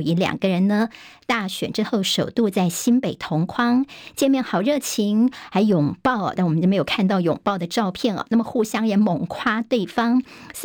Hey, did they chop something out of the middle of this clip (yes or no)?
yes